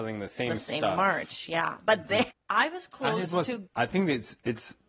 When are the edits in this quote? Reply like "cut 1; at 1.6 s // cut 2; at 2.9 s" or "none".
cut 1; at 2.3 s // cut 2; at 3.7 s